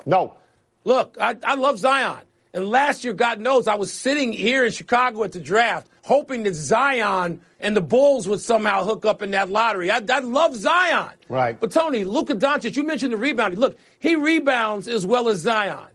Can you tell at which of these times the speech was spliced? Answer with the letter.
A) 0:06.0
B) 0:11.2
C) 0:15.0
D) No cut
A